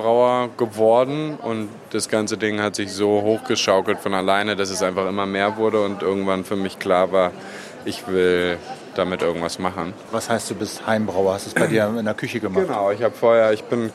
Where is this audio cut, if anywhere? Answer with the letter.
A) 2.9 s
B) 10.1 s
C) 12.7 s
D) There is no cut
D